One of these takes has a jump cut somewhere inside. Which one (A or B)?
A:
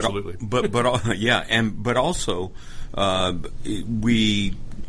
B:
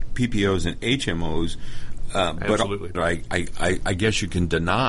B